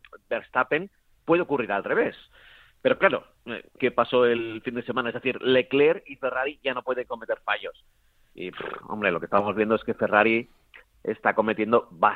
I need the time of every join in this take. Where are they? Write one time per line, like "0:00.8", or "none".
0:03.8